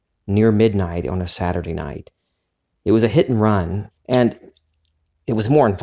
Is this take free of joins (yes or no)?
no